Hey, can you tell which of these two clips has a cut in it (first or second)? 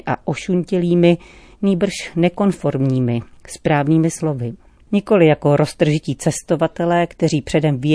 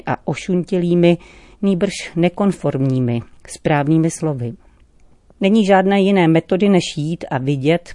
first